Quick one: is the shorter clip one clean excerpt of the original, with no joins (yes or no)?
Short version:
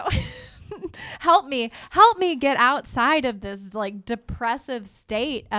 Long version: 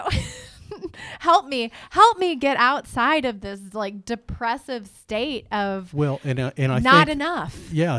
yes